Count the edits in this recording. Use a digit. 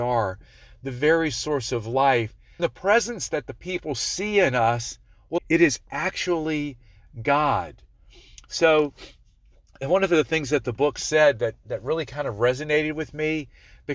2